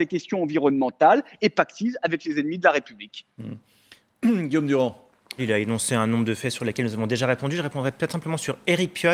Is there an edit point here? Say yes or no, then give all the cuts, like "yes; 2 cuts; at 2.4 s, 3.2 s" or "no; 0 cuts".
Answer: yes; 1 cut; at 5.4 s